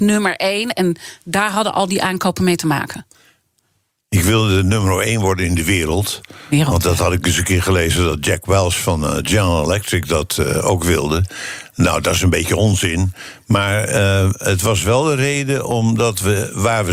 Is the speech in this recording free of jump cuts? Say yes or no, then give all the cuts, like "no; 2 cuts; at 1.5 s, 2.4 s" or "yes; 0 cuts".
yes; 0 cuts